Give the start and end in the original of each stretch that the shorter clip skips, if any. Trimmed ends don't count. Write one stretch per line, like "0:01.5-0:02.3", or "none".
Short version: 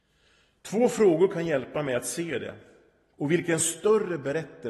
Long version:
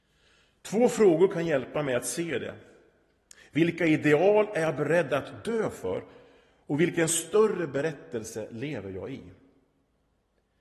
0:03.1-0:06.6